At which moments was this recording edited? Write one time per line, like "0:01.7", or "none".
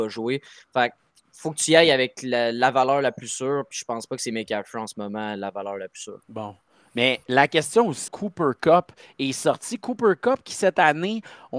0:06.2
0:08.1